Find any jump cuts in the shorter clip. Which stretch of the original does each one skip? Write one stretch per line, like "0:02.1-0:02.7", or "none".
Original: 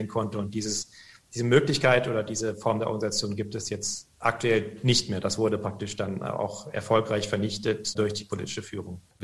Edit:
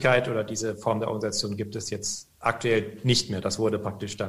none